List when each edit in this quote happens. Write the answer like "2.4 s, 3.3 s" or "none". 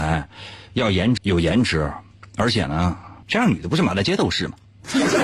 1.2 s, 3.2 s